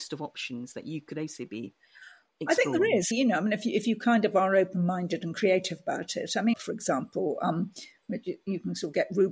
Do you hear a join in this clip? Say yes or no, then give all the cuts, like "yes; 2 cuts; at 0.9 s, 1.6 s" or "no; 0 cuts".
yes; 2 cuts; at 3.1 s, 6.5 s